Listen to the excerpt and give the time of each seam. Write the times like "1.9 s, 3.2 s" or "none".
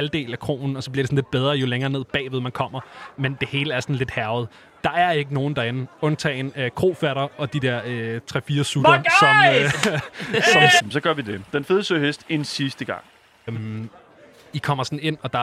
10.8 s, 13.5 s

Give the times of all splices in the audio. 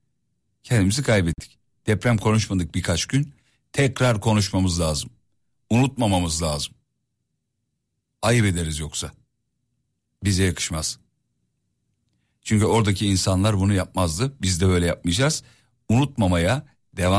none

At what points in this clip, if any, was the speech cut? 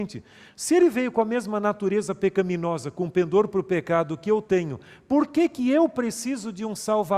none

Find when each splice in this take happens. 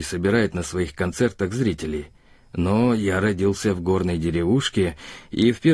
none

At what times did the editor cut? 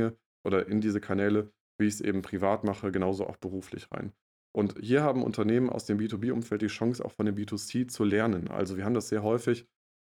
none

